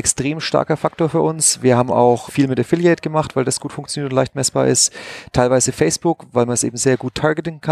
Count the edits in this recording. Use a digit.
1